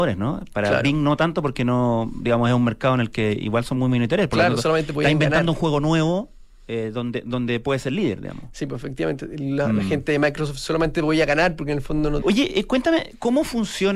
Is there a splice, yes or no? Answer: yes